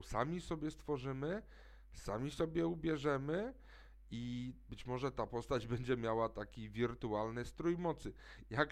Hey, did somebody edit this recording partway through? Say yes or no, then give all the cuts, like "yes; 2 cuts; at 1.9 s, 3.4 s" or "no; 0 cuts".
no; 0 cuts